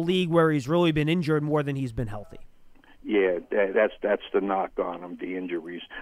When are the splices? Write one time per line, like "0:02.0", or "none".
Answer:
none

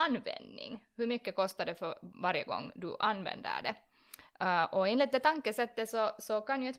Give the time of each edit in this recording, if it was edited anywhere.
none

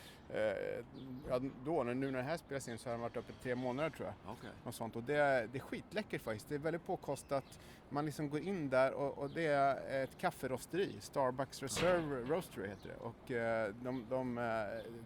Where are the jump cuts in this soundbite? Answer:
none

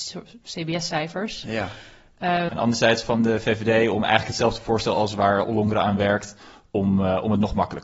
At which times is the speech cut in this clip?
0:02.5

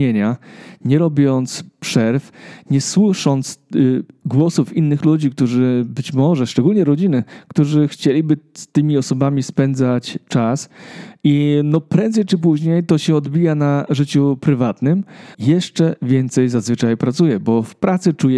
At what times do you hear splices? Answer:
0:15.3

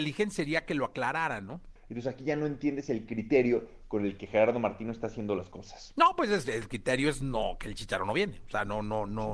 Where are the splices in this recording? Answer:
0:01.8

